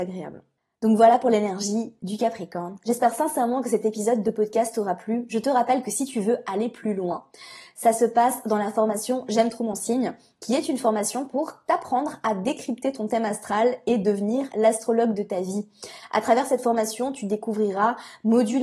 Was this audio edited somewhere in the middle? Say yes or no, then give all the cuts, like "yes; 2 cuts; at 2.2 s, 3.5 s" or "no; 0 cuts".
no; 0 cuts